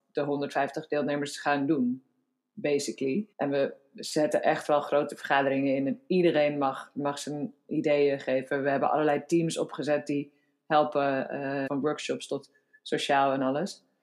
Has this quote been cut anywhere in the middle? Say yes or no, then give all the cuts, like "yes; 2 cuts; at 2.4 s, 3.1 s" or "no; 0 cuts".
yes; 2 cuts; at 3.3 s, 11.7 s